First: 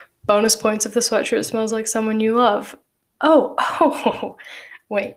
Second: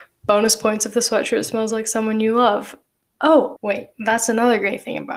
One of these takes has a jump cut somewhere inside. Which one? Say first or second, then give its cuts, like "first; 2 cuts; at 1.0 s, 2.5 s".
second; 1 cut; at 3.6 s